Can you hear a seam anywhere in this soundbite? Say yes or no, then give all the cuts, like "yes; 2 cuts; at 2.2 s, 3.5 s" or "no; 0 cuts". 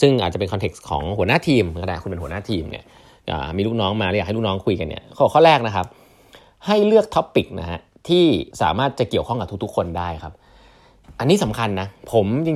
yes; 1 cut; at 8.5 s